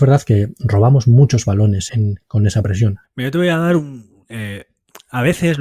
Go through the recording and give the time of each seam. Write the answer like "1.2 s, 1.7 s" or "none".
1.9 s, 3.0 s